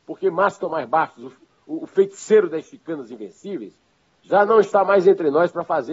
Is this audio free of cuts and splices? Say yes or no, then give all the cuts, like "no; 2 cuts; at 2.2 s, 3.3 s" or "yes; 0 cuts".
yes; 0 cuts